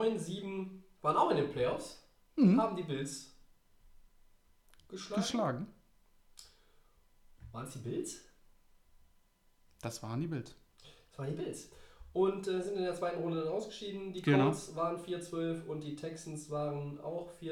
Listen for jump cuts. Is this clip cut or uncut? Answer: uncut